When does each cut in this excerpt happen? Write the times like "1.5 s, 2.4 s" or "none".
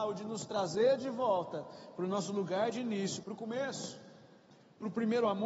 3.2 s

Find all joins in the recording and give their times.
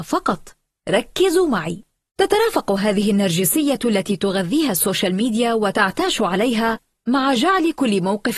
2.1 s

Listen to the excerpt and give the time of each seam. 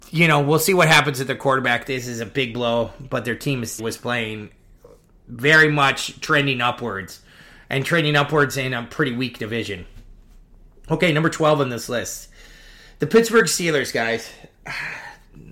3.8 s

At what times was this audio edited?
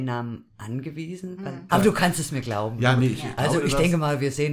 1.7 s

